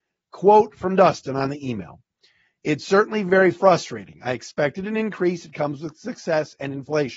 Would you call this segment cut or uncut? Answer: uncut